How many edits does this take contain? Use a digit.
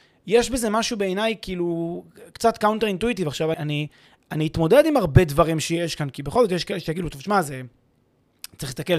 1